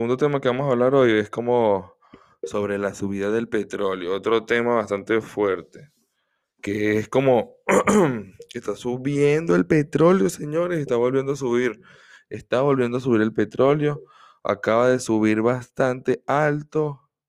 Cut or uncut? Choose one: uncut